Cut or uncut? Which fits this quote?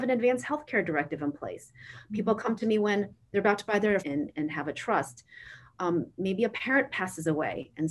cut